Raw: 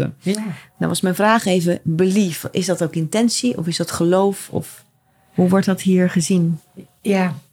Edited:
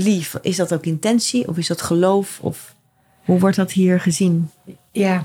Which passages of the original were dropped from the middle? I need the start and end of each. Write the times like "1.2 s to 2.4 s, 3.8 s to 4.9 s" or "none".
none